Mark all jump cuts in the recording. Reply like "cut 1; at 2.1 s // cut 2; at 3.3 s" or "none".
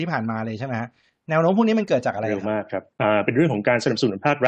cut 1; at 2.9 s